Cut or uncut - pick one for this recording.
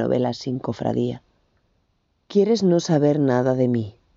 cut